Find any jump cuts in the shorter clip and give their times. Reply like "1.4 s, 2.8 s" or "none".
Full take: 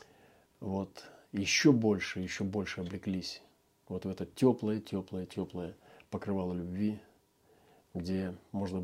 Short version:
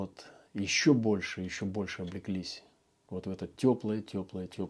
none